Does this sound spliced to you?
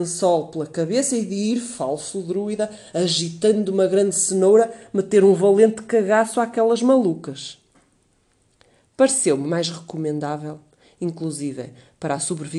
no; 0 cuts

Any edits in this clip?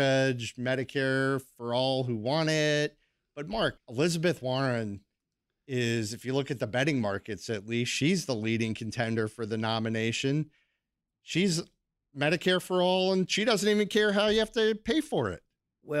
yes; 1 cut; at 3.8 s

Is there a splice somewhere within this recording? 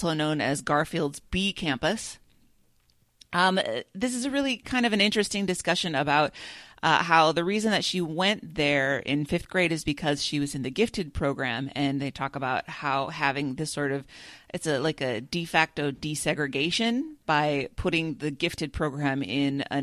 yes; 1 cut; at 17.2 s

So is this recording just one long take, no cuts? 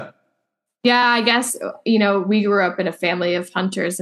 yes; 0 cuts

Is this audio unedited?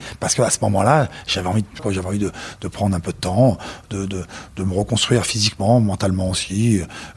no; 1 cut; at 1.8 s

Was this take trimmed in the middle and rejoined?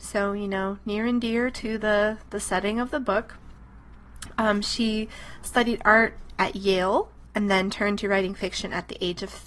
no; 0 cuts

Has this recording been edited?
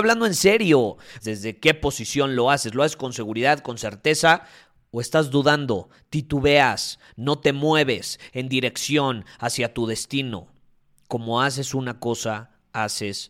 yes; 1 cut; at 1.2 s

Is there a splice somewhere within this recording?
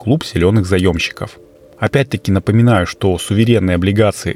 no; 0 cuts

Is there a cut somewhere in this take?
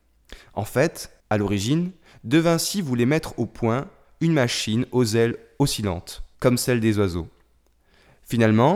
yes; 2 cuts; at 1.2 s, 6.3 s

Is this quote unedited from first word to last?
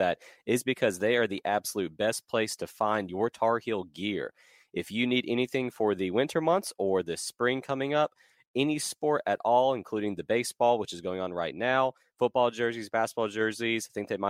yes; 0 cuts

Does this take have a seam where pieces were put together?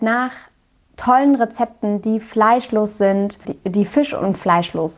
yes; 1 cut; at 3.4 s

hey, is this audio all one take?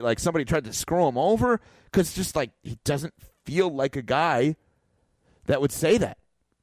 yes; 0 cuts

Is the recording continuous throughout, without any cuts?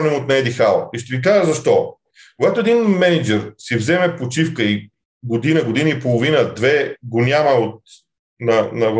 yes; 0 cuts

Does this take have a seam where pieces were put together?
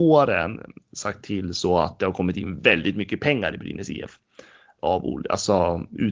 no; 0 cuts

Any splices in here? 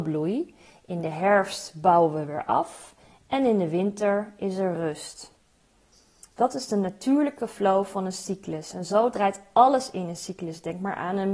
no; 0 cuts

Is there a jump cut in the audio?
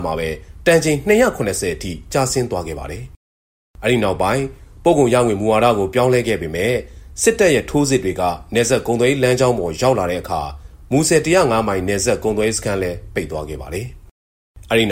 no; 0 cuts

